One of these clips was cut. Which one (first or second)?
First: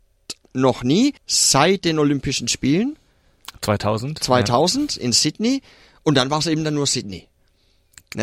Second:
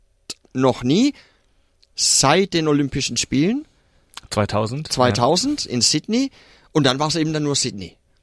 first